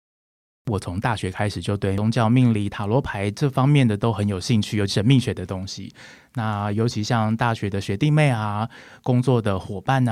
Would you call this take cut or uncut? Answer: cut